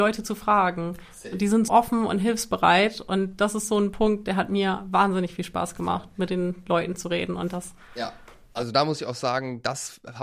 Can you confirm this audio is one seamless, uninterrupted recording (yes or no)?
no